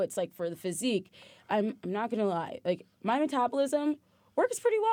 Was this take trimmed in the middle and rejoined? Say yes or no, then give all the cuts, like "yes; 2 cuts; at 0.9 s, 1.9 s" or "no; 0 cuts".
no; 0 cuts